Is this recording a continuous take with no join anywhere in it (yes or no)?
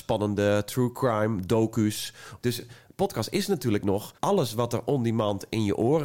no